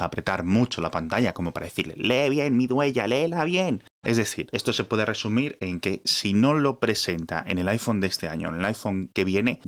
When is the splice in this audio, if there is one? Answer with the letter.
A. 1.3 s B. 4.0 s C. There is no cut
B